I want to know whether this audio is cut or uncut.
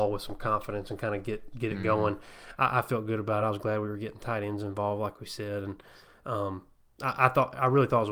uncut